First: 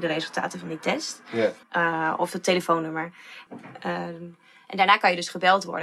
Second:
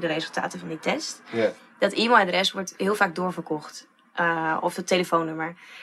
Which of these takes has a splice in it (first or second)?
first